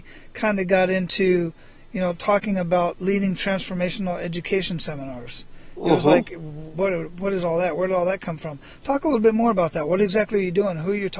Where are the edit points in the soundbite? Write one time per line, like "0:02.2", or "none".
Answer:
0:06.7